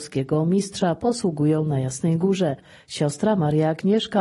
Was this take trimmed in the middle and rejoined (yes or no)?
no